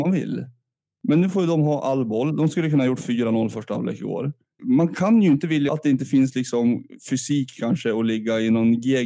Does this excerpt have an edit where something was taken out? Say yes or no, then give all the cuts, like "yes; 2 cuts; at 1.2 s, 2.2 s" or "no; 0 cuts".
yes; 2 cuts; at 4.6 s, 5.7 s